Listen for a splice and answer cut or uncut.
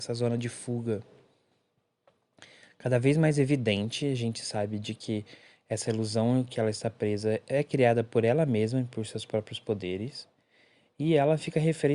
uncut